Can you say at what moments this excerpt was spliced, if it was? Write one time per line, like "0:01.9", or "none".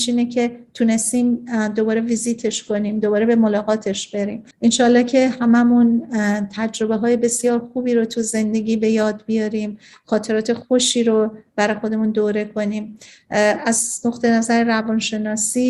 0:04.5

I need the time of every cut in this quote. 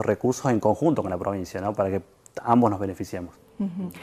none

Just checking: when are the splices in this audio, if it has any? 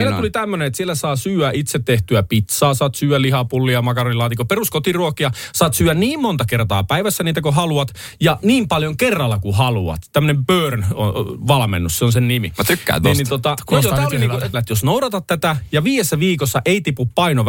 0:14.5

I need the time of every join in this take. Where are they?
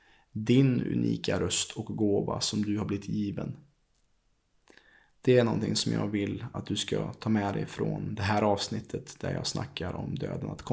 none

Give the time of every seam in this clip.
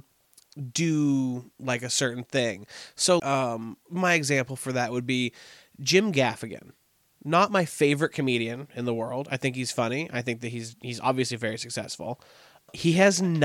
0:03.2

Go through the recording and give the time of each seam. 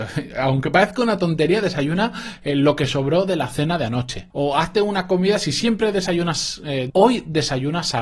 0:04.3
0:06.9

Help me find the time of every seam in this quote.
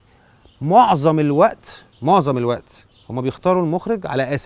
0:01.9

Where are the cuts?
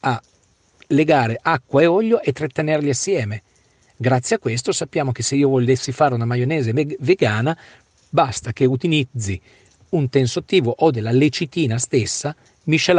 none

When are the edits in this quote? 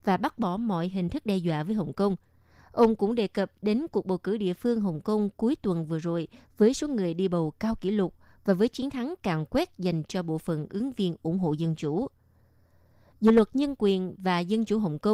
none

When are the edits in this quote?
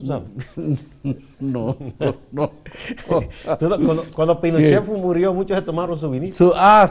none

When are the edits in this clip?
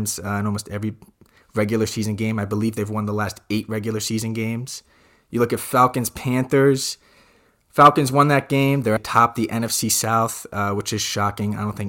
0:09.0

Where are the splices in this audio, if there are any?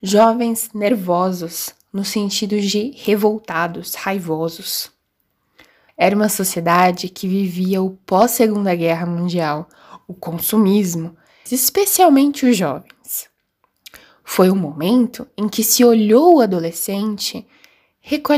0:05.9
0:11.5

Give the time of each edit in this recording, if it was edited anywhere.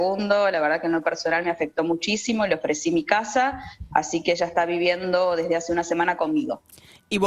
none

